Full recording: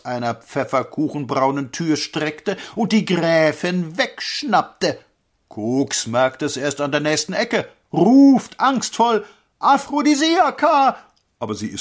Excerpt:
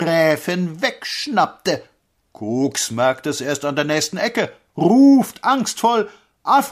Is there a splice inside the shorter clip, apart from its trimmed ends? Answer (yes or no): no